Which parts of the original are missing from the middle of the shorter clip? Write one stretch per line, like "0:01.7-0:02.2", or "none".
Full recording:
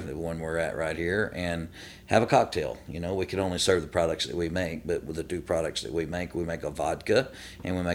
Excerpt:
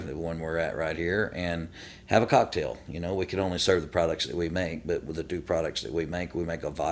none